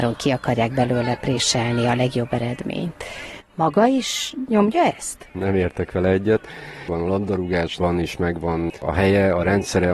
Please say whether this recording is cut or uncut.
cut